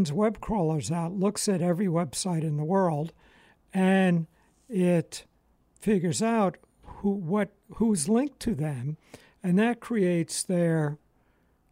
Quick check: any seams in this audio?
no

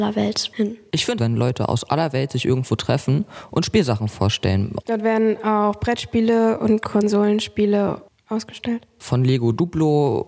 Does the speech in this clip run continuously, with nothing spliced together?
no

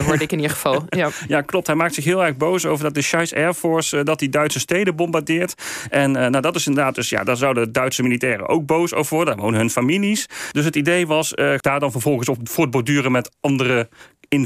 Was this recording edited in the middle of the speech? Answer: yes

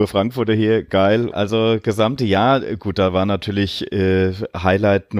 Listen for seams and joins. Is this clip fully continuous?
no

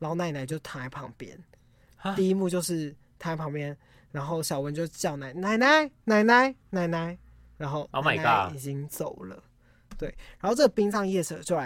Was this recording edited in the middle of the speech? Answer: no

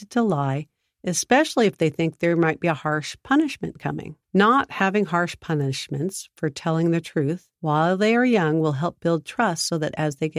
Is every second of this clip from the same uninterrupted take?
no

